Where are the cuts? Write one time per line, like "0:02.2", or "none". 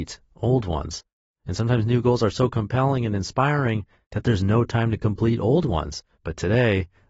0:06.2